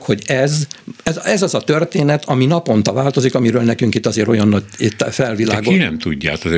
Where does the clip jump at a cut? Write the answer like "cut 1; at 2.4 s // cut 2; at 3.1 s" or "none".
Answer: none